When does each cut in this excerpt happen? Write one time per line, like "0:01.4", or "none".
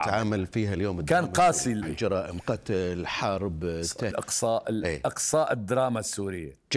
0:01.8
0:04.1